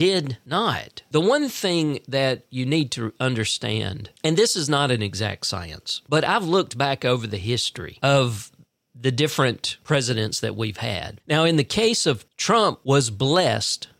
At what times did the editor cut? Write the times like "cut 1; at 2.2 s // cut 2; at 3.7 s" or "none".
cut 1; at 11.2 s // cut 2; at 12.3 s